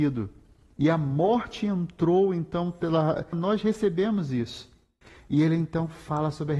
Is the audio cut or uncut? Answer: cut